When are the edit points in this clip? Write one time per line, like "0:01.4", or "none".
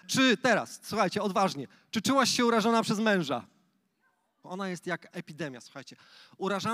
0:04.4